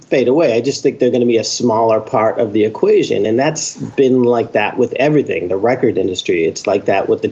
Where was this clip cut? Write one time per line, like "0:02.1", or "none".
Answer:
none

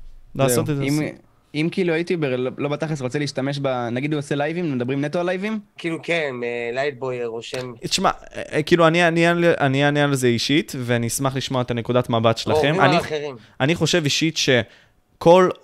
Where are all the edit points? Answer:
0:05.8

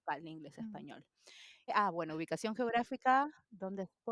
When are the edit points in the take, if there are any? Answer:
0:01.7

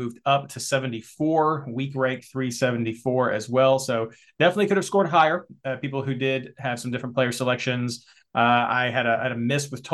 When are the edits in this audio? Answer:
none

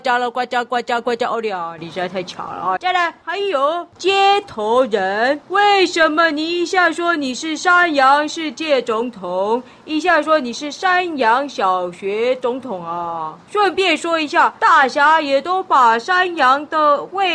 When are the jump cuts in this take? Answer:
0:02.8

